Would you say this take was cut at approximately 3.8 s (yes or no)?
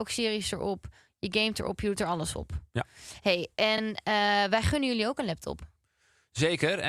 no